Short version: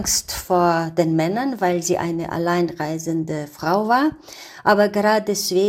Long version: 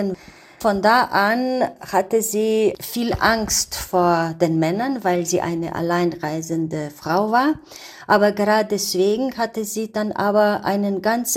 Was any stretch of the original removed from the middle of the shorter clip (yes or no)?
no